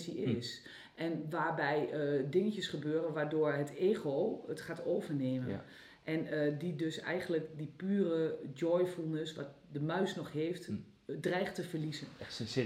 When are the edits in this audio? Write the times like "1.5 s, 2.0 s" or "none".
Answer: none